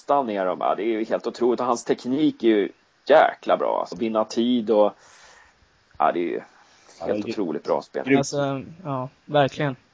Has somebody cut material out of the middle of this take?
yes; 1 cut; at 3.9 s

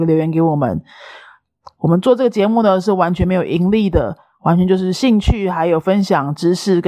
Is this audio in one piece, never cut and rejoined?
yes; 0 cuts

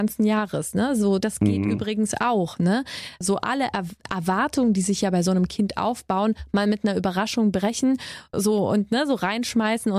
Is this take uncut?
no; 1 cut; at 1.2 s

